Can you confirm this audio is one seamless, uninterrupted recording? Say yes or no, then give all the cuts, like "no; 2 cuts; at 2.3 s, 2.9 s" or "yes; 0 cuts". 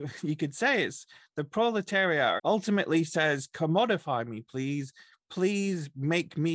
no; 1 cut; at 2.4 s